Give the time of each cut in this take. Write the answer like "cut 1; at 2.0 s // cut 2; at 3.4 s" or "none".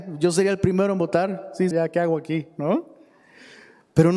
cut 1; at 1.7 s